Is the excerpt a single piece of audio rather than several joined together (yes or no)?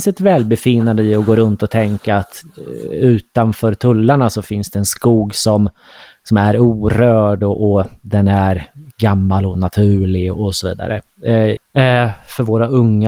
no